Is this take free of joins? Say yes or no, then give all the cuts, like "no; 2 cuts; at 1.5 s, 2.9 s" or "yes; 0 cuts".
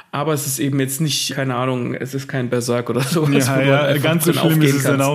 no; 1 cut; at 1.3 s